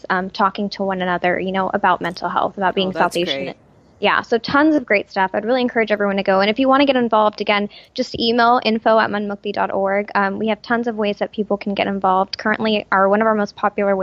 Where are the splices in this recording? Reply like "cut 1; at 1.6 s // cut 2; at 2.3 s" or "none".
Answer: none